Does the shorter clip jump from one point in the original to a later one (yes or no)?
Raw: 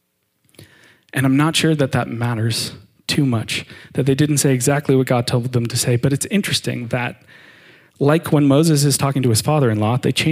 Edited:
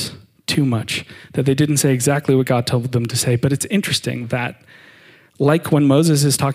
no